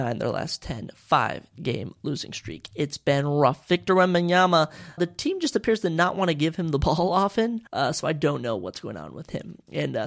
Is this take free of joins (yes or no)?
no